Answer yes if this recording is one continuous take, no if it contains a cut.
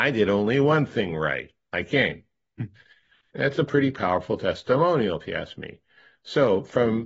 yes